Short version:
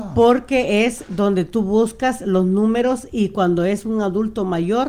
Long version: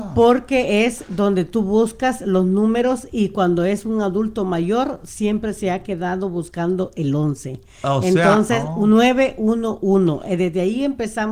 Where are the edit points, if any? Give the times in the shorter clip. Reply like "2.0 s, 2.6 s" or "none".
none